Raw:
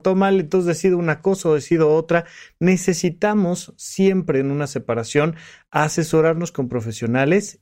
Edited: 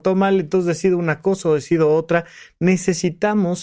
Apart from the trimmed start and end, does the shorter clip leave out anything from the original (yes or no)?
no